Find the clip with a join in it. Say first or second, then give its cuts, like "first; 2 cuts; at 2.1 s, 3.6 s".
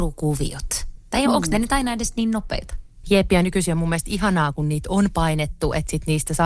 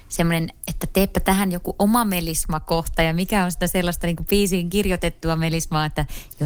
first; 1 cut; at 3.0 s